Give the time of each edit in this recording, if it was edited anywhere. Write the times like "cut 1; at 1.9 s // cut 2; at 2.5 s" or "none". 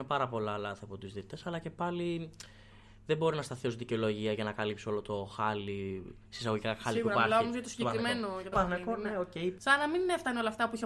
cut 1; at 8.5 s // cut 2; at 9.6 s